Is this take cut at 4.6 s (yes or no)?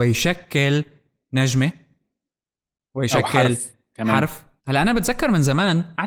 yes